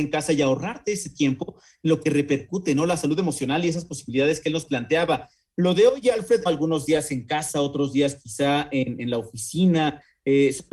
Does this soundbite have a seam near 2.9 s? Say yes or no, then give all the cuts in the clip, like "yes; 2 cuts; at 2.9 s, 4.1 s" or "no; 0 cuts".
no; 1 cut; at 6.5 s